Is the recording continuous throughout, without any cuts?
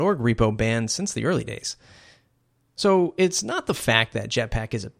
yes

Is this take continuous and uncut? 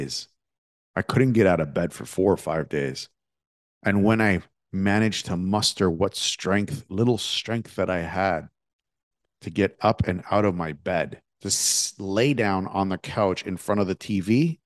no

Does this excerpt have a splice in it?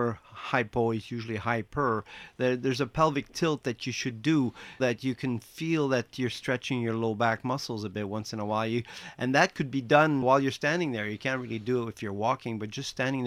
yes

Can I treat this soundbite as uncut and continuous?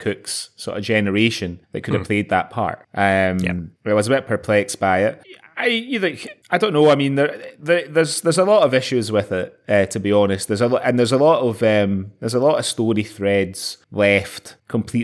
yes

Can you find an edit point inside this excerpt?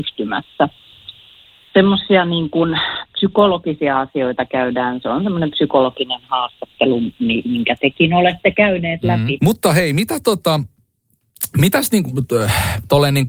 yes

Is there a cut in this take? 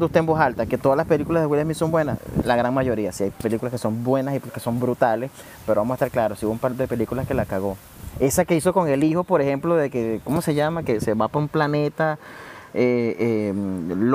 no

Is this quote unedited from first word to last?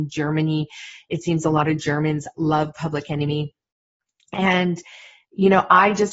yes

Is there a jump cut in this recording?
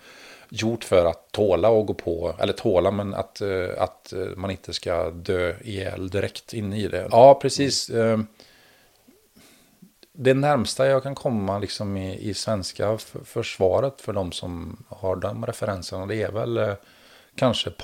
yes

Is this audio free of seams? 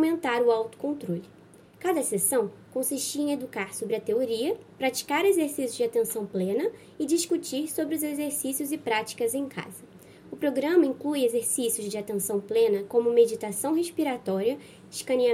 yes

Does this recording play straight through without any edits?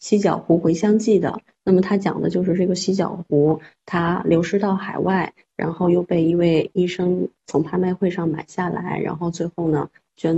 yes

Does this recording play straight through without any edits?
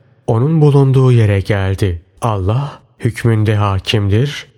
no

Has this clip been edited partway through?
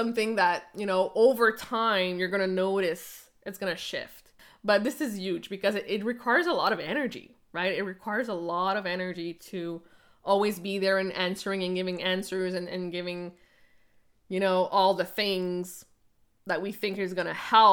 no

